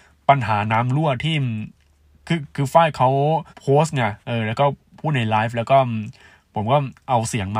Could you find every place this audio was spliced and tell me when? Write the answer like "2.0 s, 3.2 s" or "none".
3.5 s